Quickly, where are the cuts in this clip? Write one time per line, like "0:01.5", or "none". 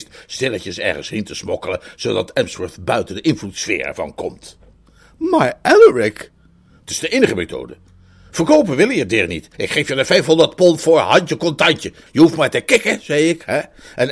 0:09.5
0:12.1